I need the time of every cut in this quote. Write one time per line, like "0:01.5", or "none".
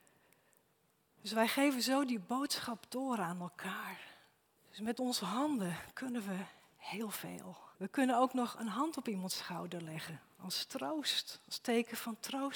0:04.6
0:07.7